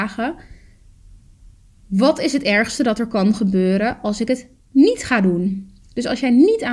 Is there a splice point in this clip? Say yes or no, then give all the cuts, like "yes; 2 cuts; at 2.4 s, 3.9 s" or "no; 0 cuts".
no; 0 cuts